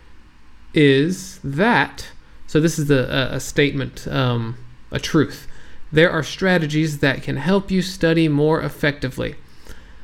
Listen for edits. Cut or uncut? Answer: uncut